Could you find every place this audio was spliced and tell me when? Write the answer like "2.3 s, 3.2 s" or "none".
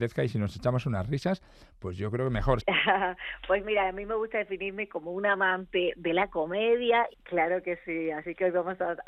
2.6 s, 7.1 s